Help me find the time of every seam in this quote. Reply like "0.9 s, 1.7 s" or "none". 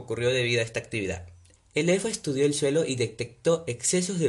1.6 s